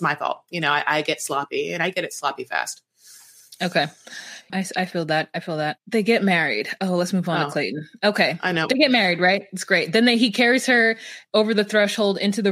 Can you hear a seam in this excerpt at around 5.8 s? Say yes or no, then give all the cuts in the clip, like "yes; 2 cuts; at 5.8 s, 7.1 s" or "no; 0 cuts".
yes; 2 cuts; at 4.5 s, 5.8 s